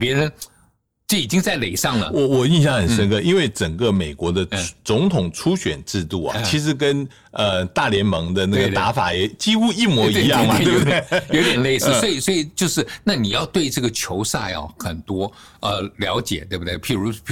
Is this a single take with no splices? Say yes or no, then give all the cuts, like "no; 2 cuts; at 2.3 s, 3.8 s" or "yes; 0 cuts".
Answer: yes; 0 cuts